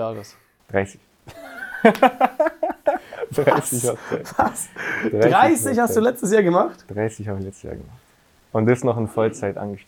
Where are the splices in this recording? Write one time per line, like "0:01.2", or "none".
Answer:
none